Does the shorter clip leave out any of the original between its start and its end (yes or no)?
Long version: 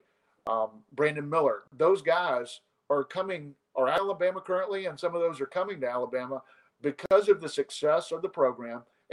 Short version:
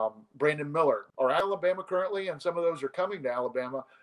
yes